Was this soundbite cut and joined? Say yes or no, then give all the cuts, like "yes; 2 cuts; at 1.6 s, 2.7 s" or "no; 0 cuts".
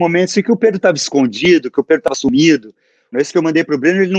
yes; 1 cut; at 3.1 s